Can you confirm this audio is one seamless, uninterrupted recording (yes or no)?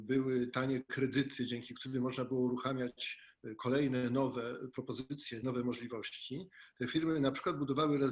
yes